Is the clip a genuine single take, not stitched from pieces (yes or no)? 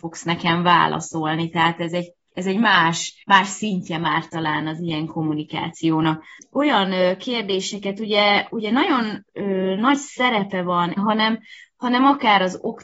no